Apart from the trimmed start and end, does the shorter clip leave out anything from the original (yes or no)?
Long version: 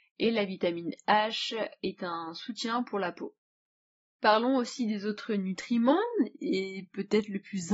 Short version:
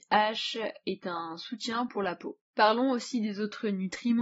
yes